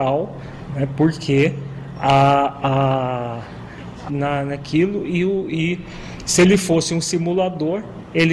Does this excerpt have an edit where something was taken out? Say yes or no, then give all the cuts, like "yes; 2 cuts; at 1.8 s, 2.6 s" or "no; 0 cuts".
yes; 1 cut; at 4.1 s